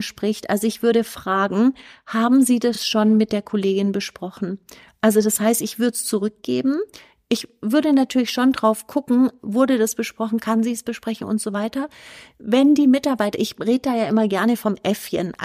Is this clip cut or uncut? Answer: uncut